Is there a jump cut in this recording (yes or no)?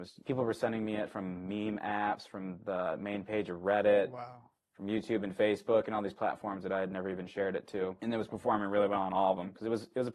no